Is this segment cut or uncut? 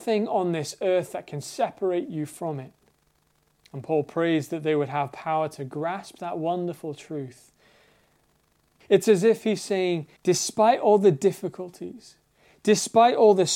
cut